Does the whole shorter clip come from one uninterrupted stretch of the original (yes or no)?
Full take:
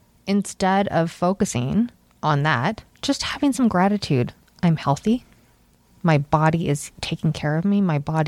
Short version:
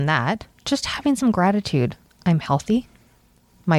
yes